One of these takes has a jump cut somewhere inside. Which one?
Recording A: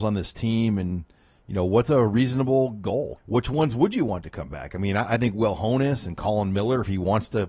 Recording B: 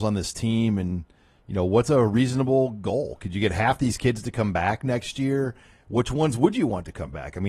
A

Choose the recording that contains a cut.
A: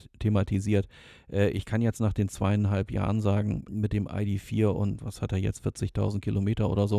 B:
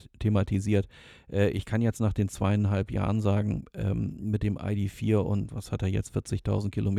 A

